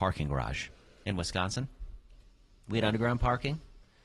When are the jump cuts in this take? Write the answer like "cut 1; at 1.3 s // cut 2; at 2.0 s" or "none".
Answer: none

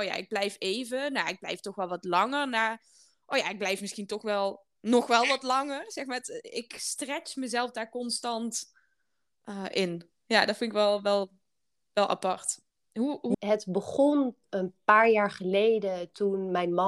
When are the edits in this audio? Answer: cut 1; at 13.3 s // cut 2; at 14.4 s

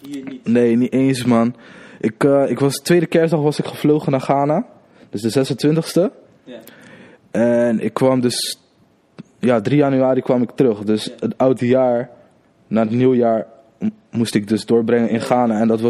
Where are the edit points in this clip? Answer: none

